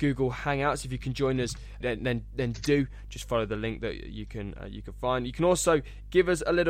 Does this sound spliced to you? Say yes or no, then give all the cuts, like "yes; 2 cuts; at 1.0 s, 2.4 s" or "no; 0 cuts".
yes; 1 cut; at 1.8 s